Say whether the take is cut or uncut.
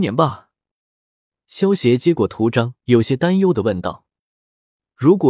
cut